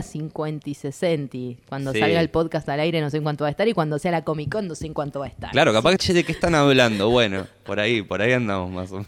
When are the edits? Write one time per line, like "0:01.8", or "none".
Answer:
0:06.0

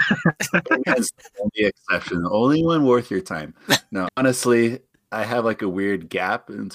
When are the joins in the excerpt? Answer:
0:04.0

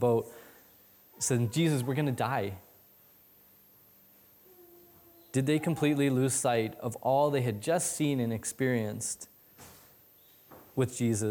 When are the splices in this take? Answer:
none

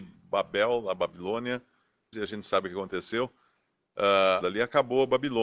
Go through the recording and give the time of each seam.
0:02.1
0:04.4

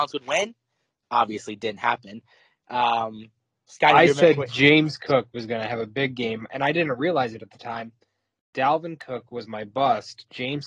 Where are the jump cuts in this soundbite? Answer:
none

